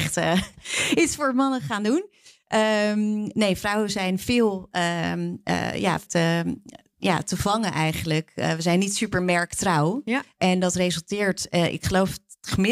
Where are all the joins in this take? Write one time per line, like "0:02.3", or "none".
0:06.1